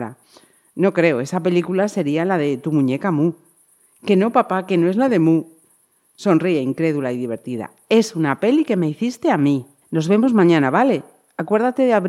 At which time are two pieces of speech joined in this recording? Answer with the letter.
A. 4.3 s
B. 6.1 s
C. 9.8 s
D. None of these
C